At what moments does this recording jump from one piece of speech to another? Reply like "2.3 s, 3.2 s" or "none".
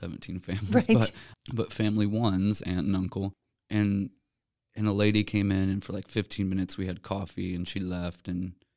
none